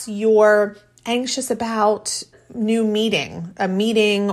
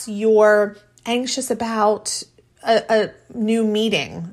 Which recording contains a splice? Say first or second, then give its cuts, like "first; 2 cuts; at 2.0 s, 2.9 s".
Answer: first; 1 cut; at 2.3 s